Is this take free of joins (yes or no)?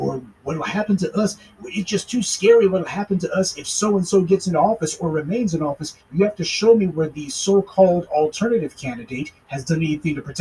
yes